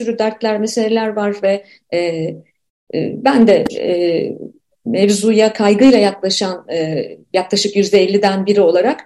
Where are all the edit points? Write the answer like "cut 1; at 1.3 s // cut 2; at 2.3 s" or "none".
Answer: none